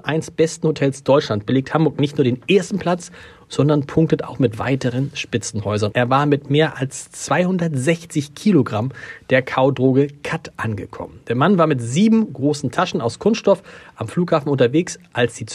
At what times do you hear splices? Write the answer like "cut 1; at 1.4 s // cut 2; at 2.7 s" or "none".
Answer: cut 1; at 5.9 s